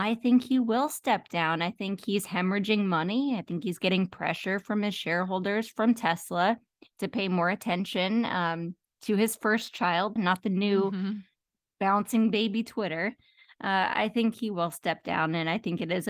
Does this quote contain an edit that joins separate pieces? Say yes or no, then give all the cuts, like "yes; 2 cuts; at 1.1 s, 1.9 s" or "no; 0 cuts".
yes; 1 cut; at 10.2 s